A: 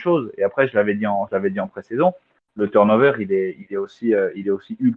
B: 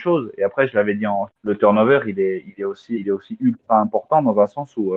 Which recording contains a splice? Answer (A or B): B